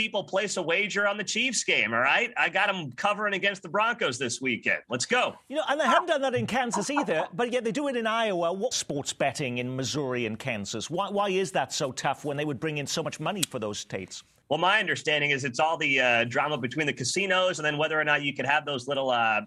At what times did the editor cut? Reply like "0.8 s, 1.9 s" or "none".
8.7 s